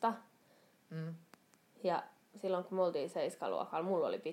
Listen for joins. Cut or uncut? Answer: uncut